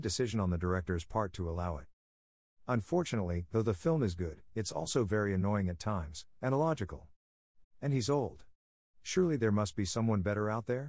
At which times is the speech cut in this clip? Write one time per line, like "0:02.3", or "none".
0:07.6